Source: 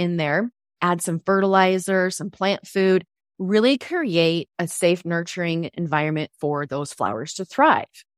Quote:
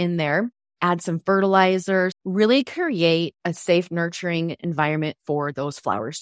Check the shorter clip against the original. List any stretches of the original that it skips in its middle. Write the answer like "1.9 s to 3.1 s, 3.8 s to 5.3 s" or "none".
2.1 s to 3.3 s